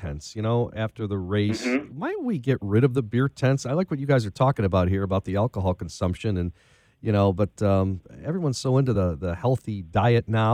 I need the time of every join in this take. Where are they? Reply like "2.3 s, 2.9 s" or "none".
none